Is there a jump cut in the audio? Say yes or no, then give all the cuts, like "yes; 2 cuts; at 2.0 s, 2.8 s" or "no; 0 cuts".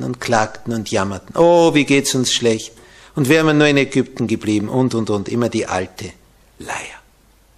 no; 0 cuts